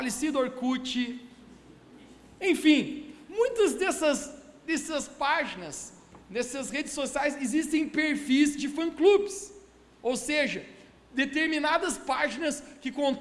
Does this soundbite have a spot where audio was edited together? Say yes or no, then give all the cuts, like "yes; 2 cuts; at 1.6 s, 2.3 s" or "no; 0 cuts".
no; 0 cuts